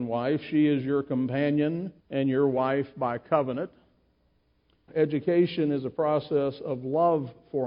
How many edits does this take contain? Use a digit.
2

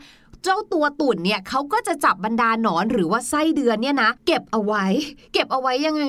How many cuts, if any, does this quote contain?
1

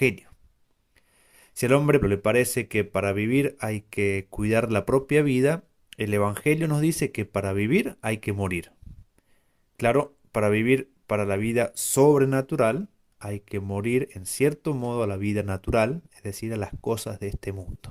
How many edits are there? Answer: 1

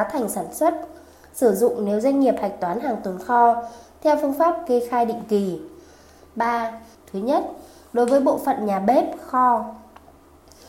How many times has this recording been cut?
1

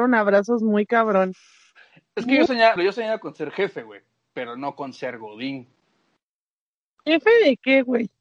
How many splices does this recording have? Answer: 1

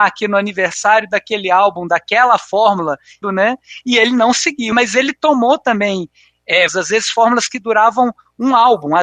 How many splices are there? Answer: 3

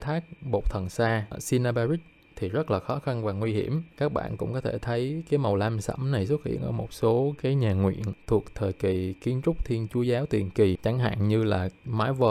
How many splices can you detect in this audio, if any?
1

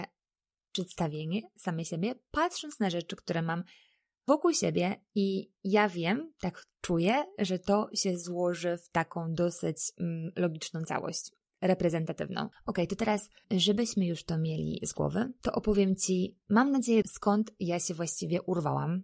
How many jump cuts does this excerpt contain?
2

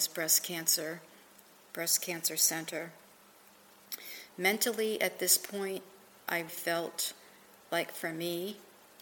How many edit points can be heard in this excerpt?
2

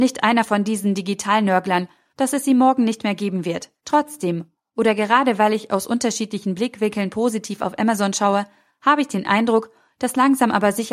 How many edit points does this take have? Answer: 2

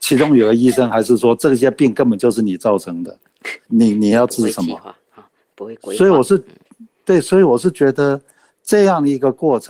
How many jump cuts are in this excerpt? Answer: 1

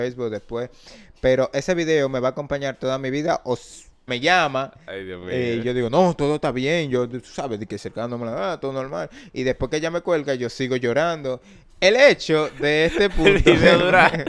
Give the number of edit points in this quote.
1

